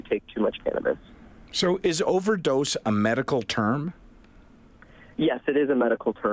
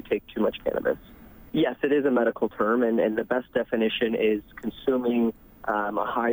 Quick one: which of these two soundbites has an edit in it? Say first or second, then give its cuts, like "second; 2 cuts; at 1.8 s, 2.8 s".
second; 1 cut; at 1.5 s